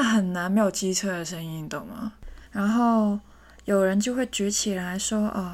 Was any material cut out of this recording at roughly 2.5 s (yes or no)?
yes